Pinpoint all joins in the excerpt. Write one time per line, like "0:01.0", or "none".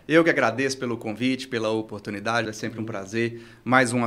0:02.4